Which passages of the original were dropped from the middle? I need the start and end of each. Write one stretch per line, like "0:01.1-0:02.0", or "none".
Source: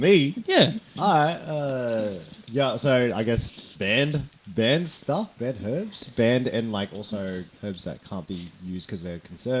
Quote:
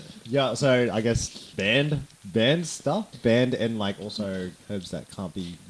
0:05.3-0:06.1